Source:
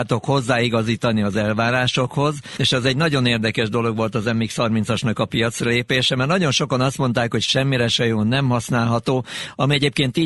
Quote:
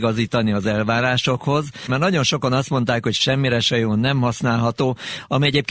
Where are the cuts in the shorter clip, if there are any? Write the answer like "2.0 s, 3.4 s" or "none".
1.9 s